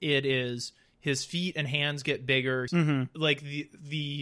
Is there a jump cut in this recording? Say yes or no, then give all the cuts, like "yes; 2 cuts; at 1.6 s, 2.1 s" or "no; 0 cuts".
yes; 1 cut; at 2.7 s